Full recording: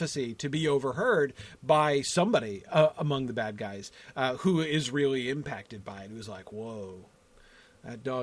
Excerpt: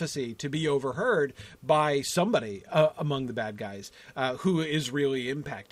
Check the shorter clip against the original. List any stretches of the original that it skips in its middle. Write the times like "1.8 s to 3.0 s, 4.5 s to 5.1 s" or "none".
none